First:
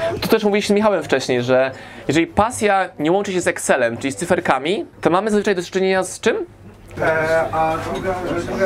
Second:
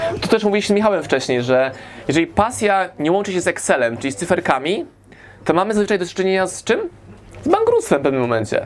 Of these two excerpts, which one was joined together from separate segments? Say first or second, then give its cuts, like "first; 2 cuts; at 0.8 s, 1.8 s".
first; 2 cuts; at 4.9 s, 7.0 s